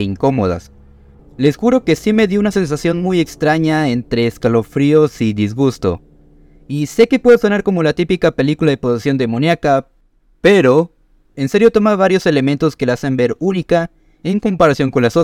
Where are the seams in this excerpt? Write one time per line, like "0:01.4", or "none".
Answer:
0:01.2